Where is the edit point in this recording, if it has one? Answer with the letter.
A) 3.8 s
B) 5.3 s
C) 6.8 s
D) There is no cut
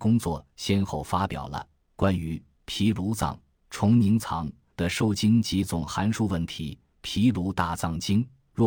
D